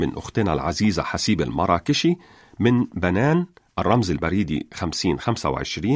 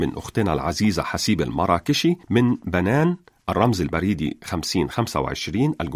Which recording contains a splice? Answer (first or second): second